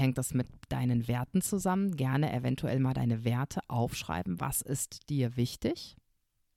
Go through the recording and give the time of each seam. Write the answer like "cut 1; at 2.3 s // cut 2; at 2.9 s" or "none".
none